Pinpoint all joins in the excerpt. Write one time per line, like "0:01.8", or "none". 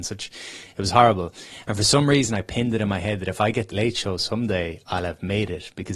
0:03.7